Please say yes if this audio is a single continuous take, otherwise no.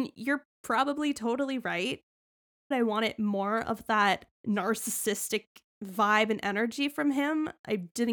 no